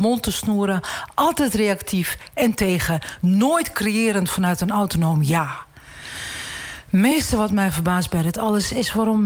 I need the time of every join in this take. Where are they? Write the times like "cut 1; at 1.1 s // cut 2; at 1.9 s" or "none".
none